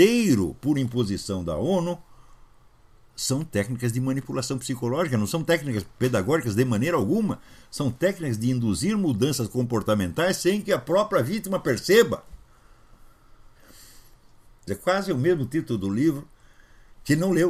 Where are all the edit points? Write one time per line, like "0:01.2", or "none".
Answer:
0:14.7